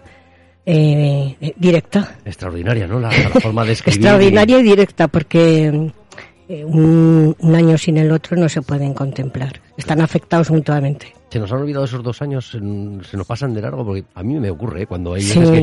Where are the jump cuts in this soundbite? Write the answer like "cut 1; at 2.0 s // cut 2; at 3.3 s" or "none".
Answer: none